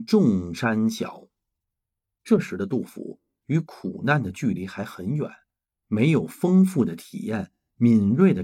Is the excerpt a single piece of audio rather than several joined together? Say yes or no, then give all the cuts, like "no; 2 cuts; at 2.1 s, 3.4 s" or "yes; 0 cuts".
no; 1 cut; at 5.7 s